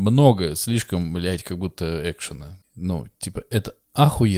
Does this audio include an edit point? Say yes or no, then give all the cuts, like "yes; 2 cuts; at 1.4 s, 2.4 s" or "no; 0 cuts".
yes; 1 cut; at 2.6 s